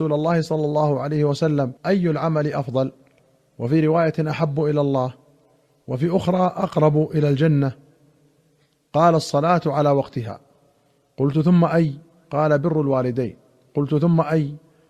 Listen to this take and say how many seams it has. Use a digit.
1